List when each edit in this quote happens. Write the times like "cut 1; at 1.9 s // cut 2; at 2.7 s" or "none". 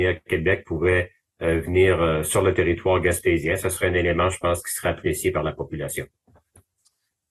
none